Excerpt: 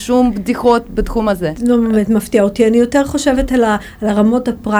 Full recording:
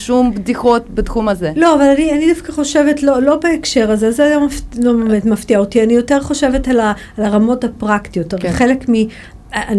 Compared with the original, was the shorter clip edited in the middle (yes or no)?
yes